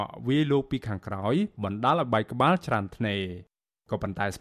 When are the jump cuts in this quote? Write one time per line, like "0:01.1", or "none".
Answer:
none

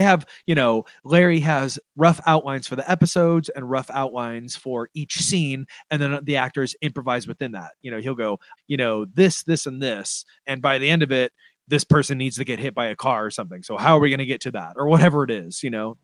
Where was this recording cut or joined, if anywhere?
0:08.6
0:11.5

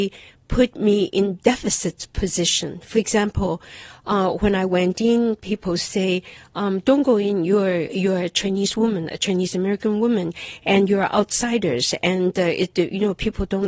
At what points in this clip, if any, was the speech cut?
none

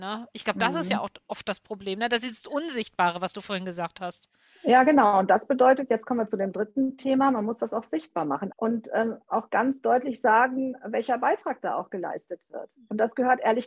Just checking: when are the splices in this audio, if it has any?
0:08.5

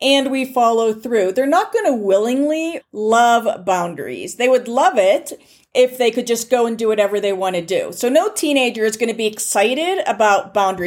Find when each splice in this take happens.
0:02.8

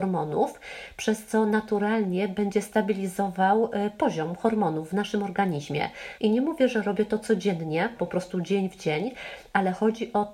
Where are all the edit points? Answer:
0:06.2
0:08.0

